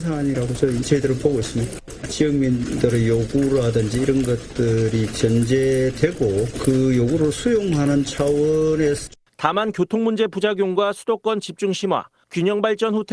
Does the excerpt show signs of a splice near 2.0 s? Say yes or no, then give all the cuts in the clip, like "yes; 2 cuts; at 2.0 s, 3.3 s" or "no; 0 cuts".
no; 0 cuts